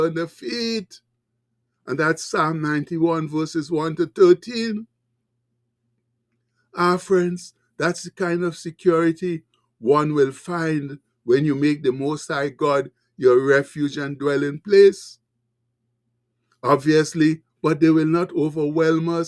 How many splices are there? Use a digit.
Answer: 1